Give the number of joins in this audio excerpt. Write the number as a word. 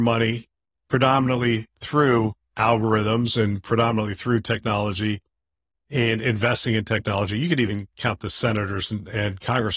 zero